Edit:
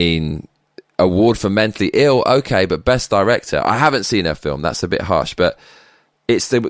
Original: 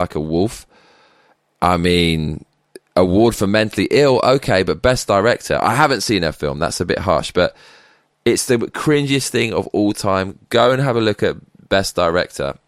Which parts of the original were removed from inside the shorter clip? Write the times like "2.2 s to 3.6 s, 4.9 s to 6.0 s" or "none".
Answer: none